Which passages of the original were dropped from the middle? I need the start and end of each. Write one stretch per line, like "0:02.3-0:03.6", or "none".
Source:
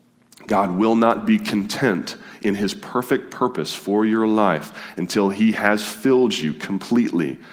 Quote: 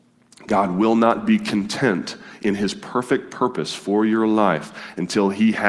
none